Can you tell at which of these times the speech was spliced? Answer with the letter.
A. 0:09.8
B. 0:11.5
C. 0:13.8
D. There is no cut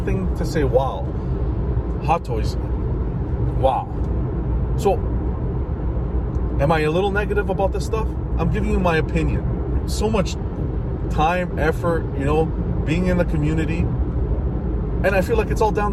A